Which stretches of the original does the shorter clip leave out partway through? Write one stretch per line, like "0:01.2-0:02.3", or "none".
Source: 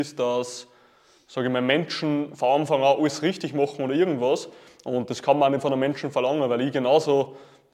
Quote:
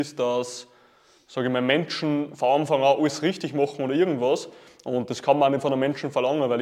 none